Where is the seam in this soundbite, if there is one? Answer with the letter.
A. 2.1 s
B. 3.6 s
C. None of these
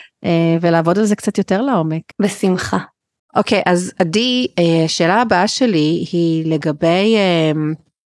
A